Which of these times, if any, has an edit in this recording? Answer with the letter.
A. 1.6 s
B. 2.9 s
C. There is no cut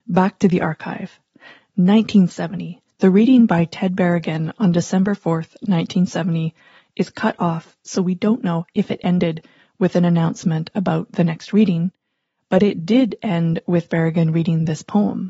B